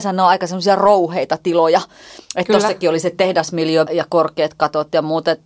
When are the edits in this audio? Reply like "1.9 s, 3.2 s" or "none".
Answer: 2.2 s, 3.9 s